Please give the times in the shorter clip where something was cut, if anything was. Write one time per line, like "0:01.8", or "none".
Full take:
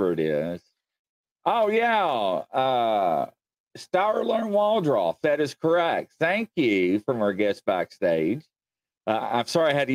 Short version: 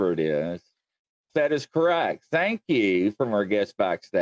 0:01.3